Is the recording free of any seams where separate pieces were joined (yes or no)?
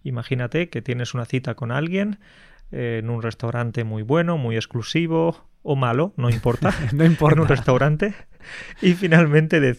yes